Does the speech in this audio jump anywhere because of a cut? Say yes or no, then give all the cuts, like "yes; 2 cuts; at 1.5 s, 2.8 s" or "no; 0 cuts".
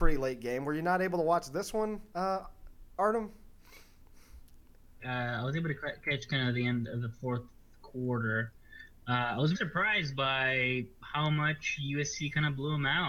yes; 2 cuts; at 5.0 s, 9.5 s